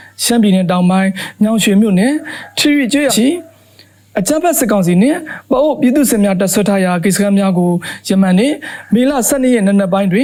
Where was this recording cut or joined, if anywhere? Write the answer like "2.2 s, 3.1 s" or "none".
3.1 s